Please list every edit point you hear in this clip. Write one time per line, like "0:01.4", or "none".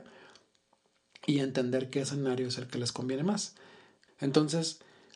0:04.1